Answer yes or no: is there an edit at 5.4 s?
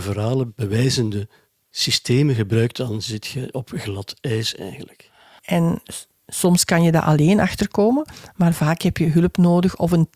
yes